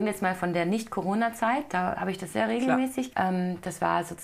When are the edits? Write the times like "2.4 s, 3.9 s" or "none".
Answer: 3.1 s